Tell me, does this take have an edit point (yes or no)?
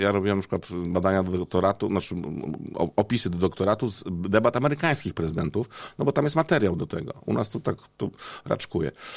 no